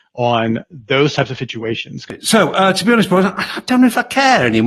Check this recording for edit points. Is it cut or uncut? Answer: uncut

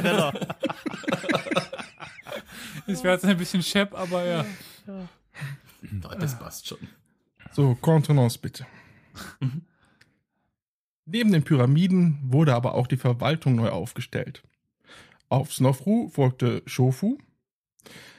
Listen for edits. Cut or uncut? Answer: uncut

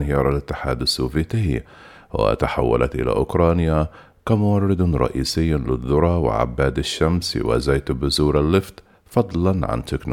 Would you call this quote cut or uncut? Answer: uncut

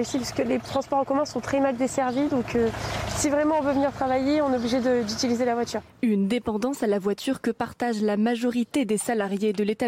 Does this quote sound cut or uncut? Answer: uncut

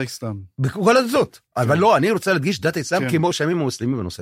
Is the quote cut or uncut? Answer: uncut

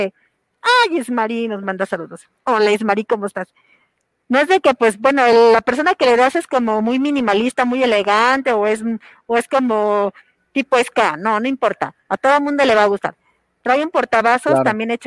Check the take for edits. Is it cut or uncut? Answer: uncut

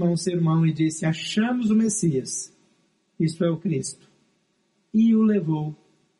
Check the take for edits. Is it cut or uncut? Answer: uncut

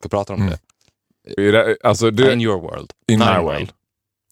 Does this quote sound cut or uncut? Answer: cut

